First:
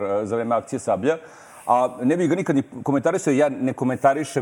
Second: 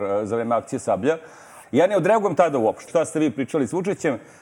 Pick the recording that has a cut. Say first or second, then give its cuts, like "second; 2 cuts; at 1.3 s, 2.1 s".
second; 2 cuts; at 1.6 s, 2.9 s